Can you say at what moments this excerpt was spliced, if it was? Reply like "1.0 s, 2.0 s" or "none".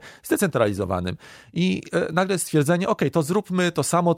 none